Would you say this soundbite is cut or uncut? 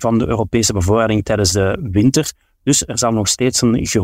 uncut